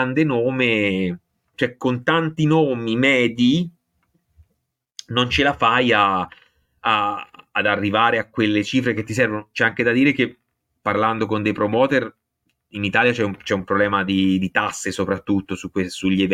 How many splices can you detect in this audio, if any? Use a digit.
0